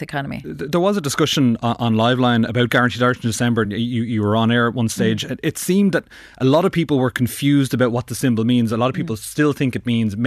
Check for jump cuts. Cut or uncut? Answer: uncut